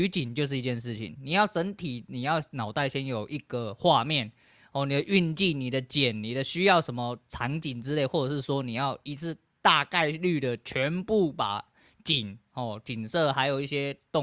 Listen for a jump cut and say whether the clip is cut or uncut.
uncut